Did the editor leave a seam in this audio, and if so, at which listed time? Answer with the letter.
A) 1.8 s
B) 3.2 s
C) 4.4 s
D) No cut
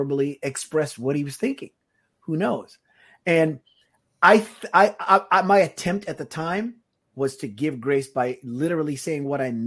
D